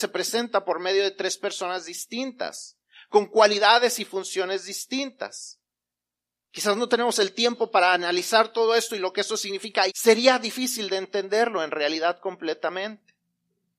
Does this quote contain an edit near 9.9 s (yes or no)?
yes